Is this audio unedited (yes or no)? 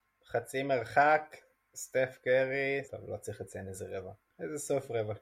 no